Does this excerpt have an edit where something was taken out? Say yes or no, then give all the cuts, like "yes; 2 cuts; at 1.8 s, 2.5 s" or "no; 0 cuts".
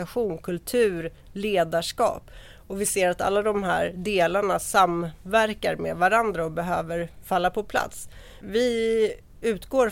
no; 0 cuts